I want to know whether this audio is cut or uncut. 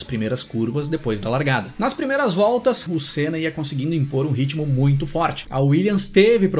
cut